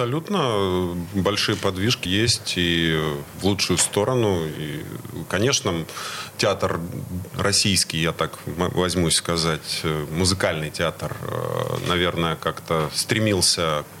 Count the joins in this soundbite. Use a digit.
1